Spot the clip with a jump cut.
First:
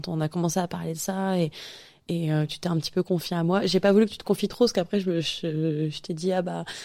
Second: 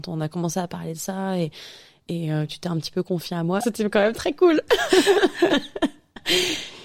second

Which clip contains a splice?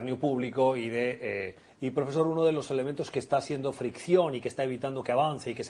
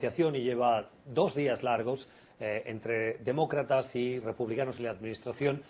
first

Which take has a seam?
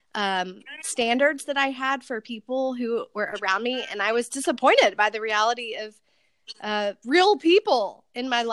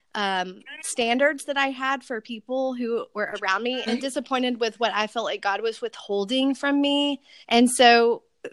second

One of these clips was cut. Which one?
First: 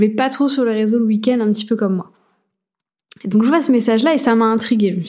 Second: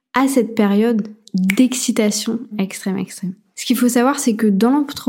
second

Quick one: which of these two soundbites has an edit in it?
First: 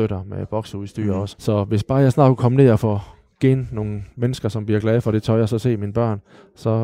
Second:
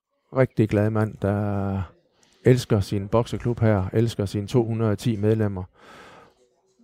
first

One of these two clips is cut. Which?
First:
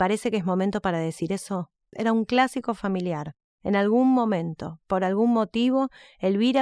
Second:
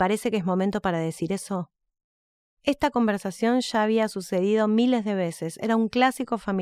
first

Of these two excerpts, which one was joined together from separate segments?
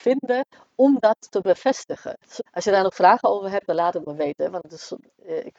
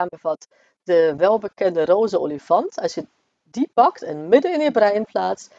first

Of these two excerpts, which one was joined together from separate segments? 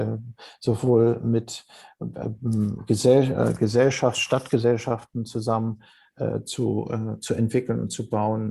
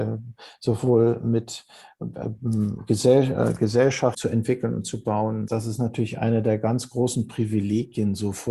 second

